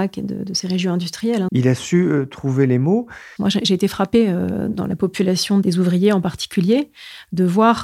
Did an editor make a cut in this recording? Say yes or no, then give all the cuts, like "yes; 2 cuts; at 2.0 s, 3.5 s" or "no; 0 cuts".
yes; 2 cuts; at 1.5 s, 3.4 s